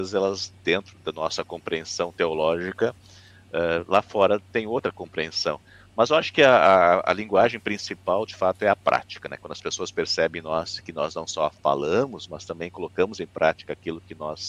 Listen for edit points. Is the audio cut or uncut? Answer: uncut